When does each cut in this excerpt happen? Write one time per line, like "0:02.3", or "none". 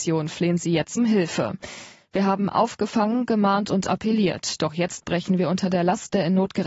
0:01.0